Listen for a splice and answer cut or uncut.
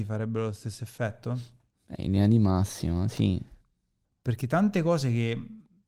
cut